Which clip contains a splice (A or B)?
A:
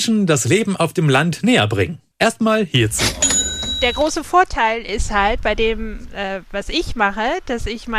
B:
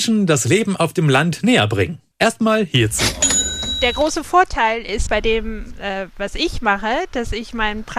B